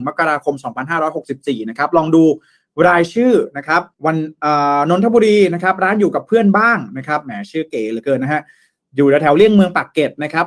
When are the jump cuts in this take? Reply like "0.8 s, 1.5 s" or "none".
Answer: 3.9 s